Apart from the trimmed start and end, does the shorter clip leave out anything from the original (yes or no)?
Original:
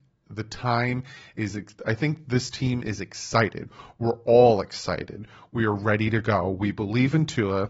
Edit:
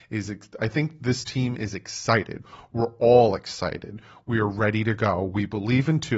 no